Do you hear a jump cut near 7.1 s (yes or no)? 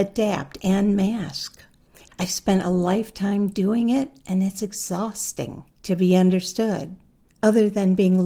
no